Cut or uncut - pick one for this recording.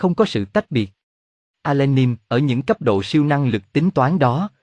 cut